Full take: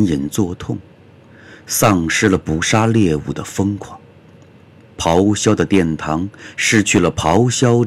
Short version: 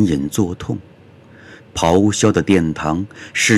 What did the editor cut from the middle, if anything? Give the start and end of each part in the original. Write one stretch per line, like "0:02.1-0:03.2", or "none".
0:01.6-0:04.8

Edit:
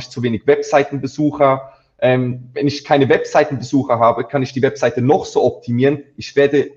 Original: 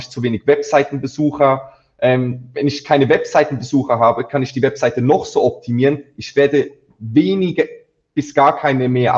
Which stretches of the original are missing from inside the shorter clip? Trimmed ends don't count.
none

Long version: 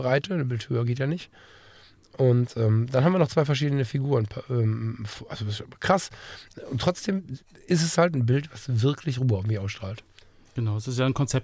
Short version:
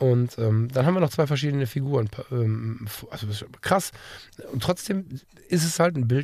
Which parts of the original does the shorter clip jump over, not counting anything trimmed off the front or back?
none

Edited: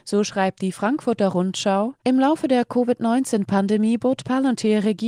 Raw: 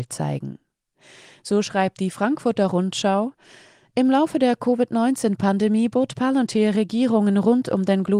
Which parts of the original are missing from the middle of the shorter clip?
0:03.4-0:03.9

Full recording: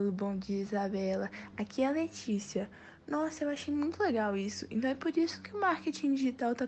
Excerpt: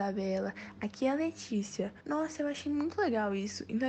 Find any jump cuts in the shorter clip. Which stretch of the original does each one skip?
0:02.8-0:03.0

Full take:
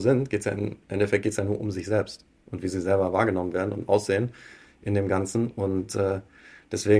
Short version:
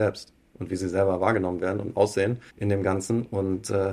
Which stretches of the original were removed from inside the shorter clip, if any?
0:04.4-0:04.7

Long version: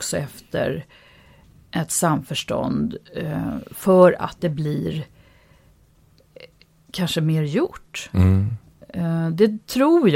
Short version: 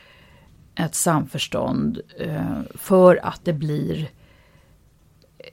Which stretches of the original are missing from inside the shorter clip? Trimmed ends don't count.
none

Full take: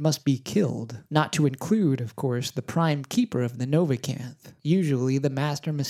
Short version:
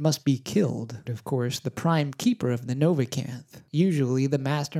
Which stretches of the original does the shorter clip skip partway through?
0:01.1-0:02.0

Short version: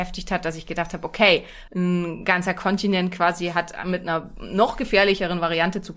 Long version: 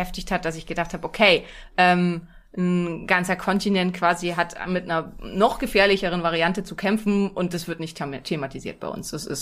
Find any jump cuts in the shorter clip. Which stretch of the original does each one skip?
0:01.7-0:02.5

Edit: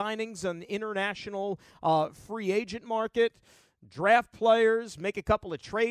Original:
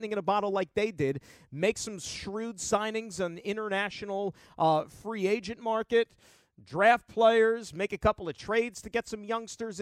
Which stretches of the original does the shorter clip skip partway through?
none

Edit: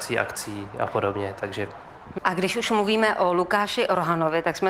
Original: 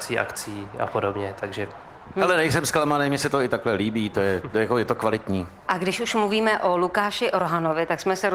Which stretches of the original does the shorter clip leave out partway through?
0:02.2-0:05.6

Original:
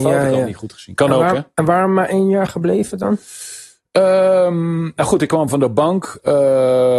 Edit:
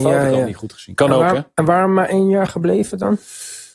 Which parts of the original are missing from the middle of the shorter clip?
none

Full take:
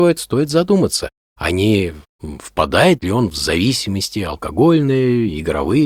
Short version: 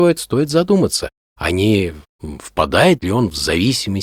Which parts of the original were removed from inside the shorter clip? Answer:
none

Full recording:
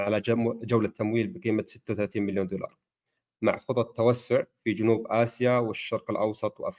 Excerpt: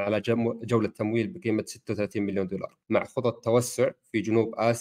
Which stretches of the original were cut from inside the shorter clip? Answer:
0:02.8-0:03.3

